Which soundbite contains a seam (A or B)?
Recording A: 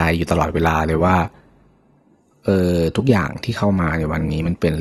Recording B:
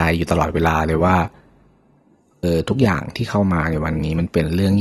B